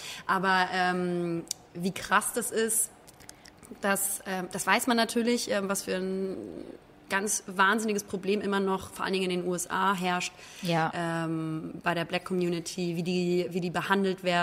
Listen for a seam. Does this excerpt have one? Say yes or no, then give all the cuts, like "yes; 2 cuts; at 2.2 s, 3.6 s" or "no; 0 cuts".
no; 0 cuts